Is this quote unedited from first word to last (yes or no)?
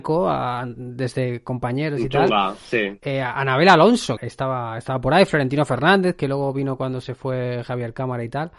no